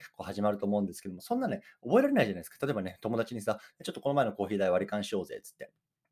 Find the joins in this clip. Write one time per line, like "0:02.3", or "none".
none